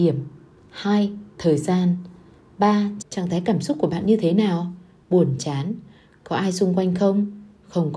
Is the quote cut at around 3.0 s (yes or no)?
yes